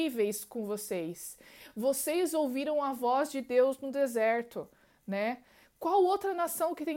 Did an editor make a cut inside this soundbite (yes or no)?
no